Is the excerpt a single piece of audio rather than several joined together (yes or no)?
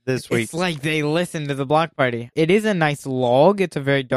no